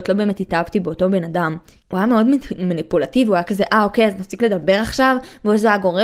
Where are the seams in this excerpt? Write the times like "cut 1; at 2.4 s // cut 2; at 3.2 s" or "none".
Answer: cut 1; at 1.8 s